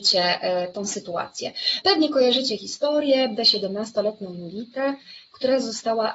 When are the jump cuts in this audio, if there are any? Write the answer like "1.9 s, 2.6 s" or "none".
1.8 s, 3.4 s